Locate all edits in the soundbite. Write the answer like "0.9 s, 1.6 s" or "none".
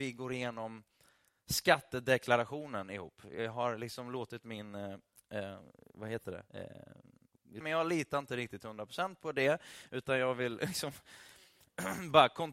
6.5 s, 7.6 s